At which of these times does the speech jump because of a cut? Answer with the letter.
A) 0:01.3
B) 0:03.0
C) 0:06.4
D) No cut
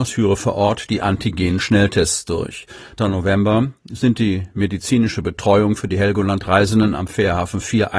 B